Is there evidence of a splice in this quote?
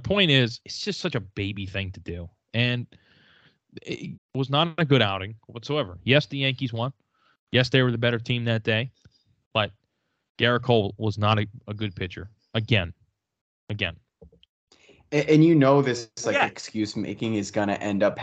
yes; 1 cut; at 4.1 s

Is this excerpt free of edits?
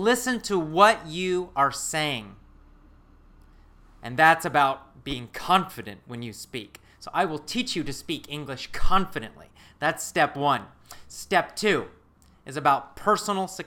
yes; 0 cuts

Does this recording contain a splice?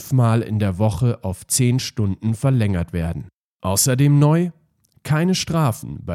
yes; 1 cut; at 3.5 s

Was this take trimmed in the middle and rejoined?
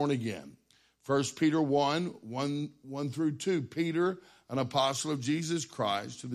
no; 0 cuts

